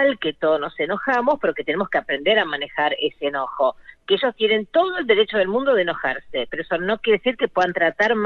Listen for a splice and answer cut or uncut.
uncut